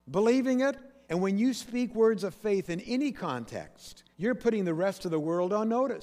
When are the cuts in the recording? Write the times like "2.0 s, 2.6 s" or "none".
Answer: 1.0 s, 4.1 s